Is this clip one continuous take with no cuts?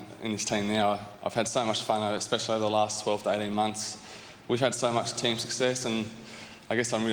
yes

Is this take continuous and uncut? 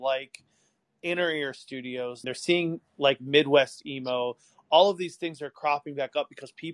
no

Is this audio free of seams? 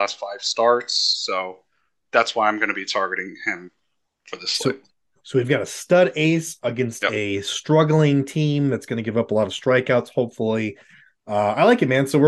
yes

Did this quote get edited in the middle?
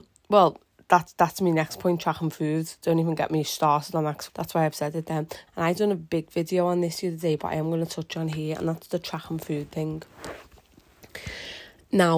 yes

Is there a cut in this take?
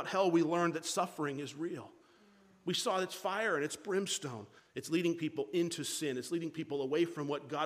yes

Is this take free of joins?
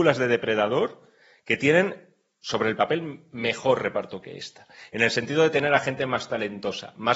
yes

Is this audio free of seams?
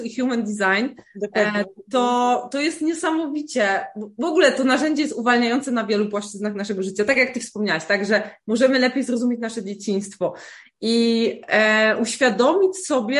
yes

